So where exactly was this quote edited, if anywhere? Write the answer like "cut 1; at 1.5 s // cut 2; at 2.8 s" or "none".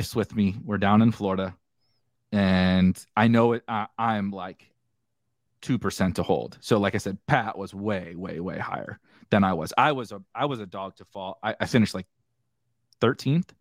none